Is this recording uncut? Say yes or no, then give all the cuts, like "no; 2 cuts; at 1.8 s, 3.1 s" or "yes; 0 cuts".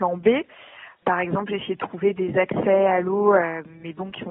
yes; 0 cuts